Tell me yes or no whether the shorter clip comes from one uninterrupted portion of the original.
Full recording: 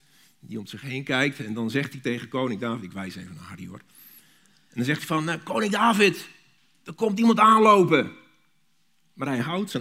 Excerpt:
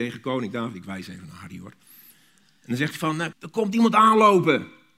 no